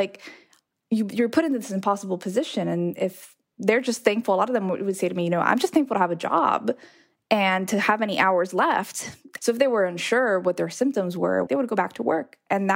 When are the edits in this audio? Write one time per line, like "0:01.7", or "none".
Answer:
0:09.4
0:11.5